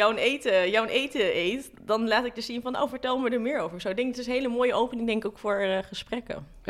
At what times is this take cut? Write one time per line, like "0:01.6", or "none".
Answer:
none